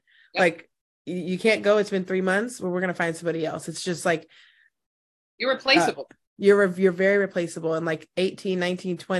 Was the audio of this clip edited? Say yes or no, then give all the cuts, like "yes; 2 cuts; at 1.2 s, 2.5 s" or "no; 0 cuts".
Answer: no; 0 cuts